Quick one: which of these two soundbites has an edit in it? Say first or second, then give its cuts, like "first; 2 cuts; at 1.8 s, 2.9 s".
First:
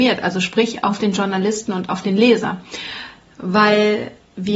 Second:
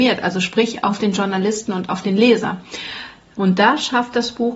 second; 1 cut; at 3.4 s